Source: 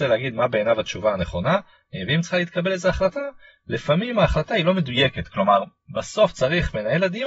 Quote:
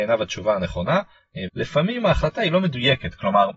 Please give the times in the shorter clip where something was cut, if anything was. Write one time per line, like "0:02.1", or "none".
0:01.5